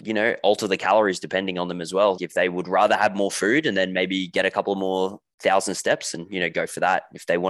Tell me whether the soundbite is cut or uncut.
cut